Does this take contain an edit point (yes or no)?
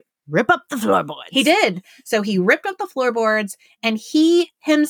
no